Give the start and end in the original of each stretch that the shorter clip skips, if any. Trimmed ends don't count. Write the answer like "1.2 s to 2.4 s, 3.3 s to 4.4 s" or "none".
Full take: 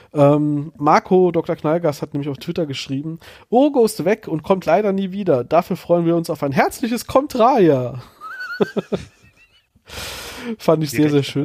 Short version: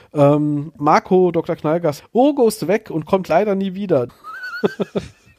2.0 s to 3.4 s, 5.5 s to 8.1 s